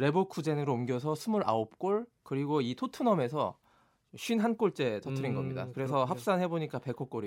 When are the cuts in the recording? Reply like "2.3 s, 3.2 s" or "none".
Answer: none